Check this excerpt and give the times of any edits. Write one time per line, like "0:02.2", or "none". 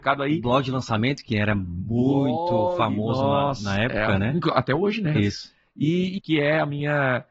0:05.1
0:06.2